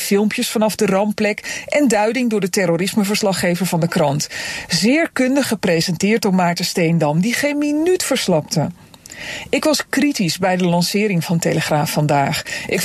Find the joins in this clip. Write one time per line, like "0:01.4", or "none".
none